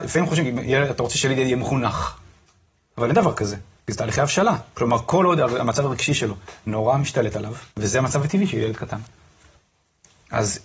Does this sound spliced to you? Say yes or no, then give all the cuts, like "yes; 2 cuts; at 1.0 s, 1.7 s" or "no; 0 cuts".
yes; 1 cut; at 7.7 s